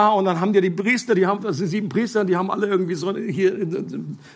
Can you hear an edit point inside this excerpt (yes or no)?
no